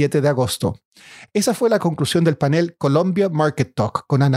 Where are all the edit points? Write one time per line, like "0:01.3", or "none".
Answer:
none